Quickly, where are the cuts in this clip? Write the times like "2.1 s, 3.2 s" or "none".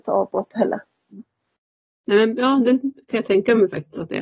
1.1 s